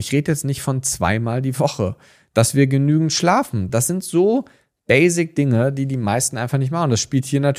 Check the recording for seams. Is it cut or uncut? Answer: uncut